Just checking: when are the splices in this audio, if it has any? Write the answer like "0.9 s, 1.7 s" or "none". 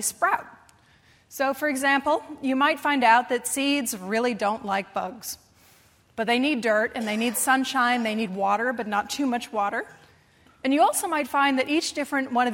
none